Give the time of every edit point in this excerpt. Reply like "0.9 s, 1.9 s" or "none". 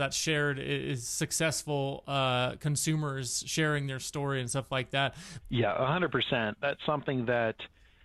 5.4 s